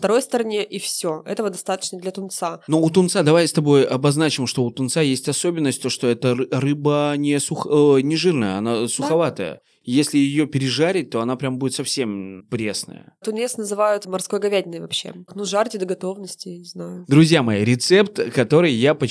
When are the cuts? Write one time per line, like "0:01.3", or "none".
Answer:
0:12.4
0:15.3